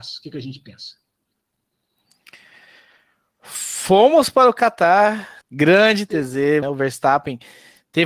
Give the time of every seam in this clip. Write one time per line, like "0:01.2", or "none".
0:05.4
0:06.6